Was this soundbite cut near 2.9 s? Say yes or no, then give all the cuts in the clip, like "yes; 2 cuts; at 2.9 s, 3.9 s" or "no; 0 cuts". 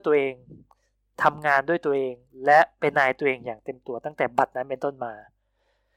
yes; 1 cut; at 2.9 s